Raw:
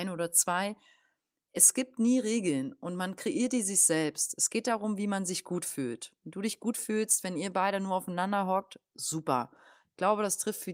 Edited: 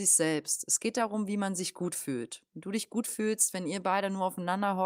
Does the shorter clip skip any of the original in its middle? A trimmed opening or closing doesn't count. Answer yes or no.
no